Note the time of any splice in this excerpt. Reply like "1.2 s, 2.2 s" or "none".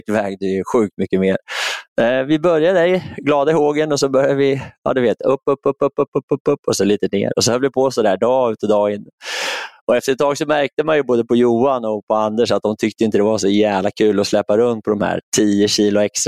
5.9 s